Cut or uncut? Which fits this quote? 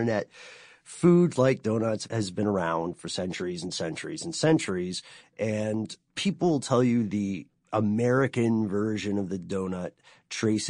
uncut